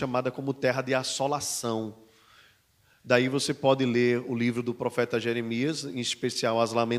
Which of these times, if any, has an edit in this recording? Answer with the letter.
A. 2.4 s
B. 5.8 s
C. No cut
C